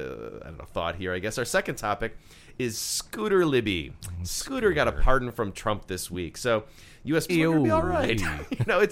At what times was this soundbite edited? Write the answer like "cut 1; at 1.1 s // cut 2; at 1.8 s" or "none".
cut 1; at 7.3 s